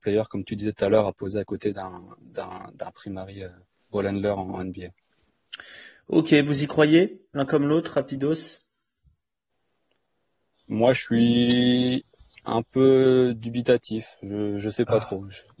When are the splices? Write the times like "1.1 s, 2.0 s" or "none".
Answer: none